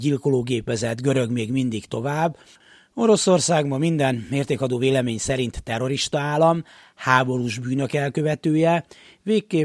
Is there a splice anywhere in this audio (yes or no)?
no